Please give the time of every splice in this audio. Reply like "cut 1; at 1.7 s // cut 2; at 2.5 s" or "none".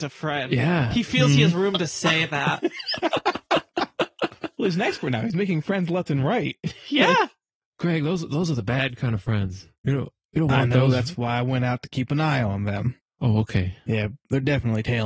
cut 1; at 9.8 s